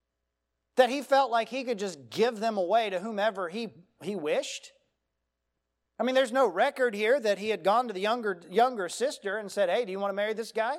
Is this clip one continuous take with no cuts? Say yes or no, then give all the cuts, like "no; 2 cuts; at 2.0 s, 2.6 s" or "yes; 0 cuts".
yes; 0 cuts